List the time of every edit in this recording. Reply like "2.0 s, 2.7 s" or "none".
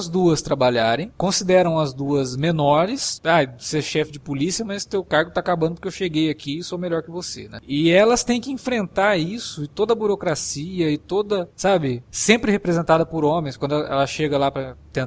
3.2 s